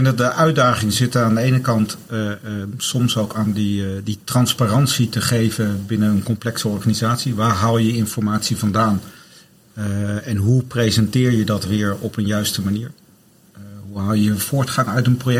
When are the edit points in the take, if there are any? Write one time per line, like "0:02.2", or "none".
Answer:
none